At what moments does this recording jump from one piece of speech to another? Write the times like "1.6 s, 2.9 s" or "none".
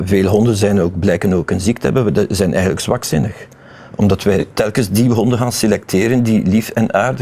none